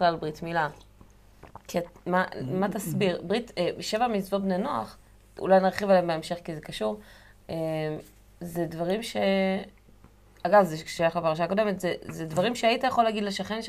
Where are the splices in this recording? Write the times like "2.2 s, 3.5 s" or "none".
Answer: none